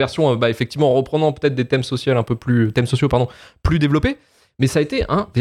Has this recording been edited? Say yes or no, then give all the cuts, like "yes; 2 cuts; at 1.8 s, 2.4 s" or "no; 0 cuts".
no; 0 cuts